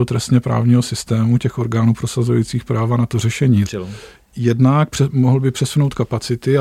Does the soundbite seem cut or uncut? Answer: cut